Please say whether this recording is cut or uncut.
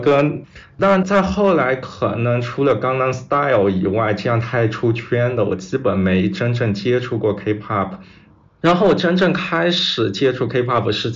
uncut